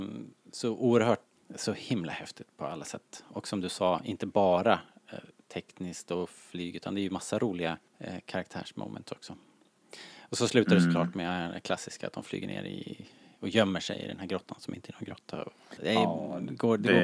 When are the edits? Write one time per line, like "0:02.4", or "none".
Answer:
0:01.4
0:07.9
0:15.8